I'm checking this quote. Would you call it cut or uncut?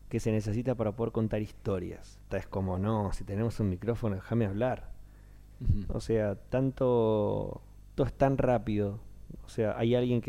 cut